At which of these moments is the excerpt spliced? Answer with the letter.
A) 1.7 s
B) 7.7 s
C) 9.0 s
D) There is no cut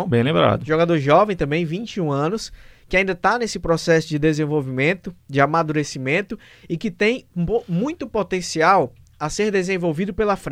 D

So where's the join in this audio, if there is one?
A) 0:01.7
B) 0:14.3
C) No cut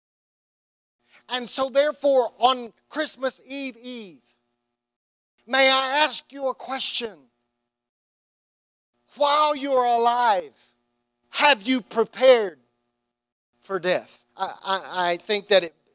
B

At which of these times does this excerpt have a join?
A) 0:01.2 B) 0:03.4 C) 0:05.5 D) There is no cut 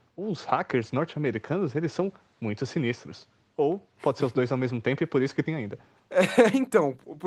C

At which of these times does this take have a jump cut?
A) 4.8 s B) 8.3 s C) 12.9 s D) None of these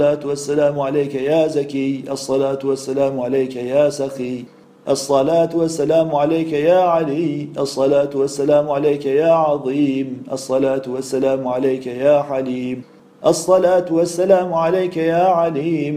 D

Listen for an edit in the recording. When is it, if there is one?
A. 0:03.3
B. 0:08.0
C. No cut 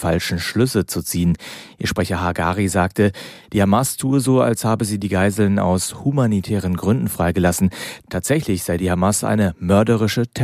C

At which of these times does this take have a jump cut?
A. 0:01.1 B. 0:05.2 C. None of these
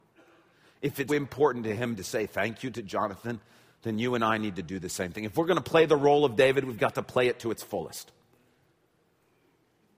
A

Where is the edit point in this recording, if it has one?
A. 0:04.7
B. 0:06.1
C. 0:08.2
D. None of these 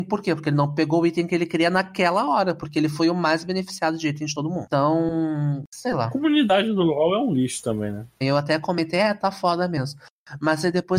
C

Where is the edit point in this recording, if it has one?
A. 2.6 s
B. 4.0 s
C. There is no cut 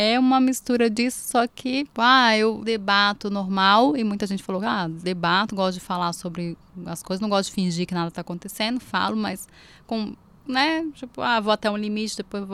A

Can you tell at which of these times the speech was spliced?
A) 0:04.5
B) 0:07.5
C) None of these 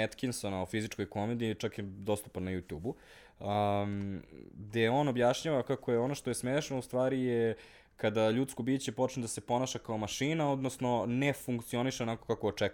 C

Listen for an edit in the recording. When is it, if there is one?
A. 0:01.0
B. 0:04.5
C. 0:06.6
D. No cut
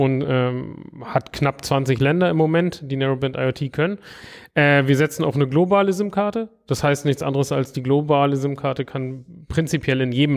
D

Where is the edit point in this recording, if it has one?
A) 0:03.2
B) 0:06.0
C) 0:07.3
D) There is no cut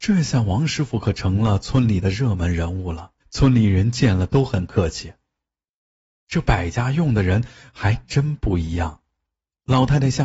A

